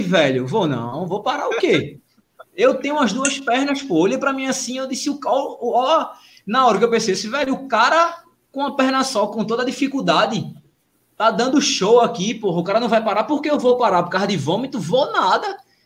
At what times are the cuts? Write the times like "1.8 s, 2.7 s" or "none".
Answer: none